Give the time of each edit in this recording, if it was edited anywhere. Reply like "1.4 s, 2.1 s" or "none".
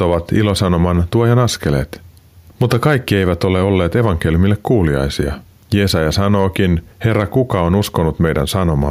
6.9 s